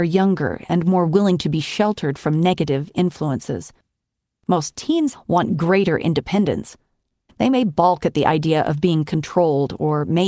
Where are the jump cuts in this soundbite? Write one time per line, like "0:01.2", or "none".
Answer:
0:05.1
0:07.3